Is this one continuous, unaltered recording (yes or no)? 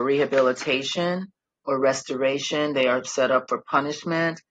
yes